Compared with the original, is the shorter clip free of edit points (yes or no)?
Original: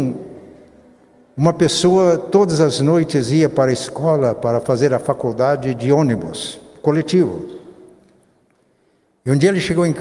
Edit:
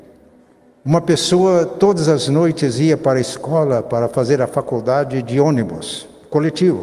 yes